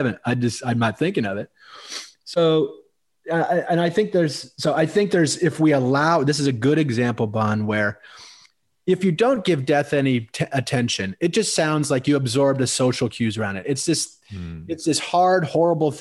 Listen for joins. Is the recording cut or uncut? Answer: uncut